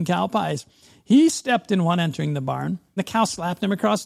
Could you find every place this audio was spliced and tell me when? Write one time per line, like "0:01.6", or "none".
0:03.0